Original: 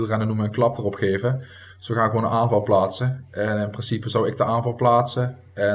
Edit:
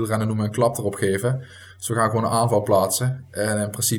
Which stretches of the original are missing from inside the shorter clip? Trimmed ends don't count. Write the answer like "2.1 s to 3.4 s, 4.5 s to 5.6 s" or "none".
none